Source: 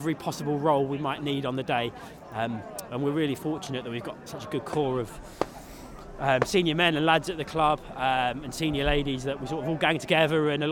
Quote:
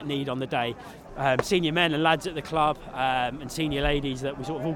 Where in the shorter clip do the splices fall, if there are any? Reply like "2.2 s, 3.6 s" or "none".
1.1 s